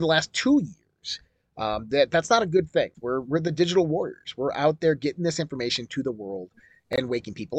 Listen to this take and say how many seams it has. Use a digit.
1